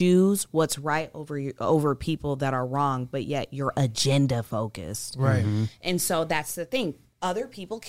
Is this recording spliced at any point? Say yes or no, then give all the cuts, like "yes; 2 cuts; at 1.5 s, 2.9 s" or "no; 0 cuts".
no; 0 cuts